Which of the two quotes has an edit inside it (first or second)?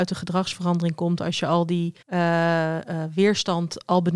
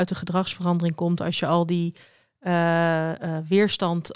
first